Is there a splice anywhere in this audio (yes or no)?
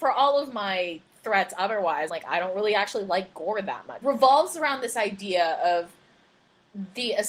yes